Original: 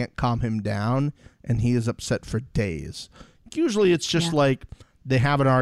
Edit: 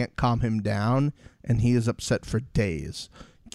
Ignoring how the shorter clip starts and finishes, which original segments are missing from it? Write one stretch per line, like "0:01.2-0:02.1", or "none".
none